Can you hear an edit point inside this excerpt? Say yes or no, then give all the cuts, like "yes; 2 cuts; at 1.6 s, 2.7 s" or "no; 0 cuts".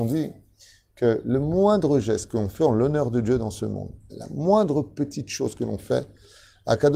yes; 1 cut; at 4.1 s